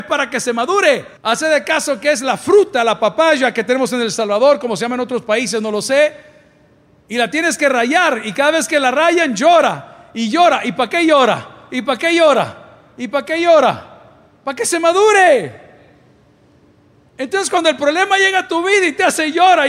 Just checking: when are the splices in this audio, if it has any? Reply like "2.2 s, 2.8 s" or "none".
1.2 s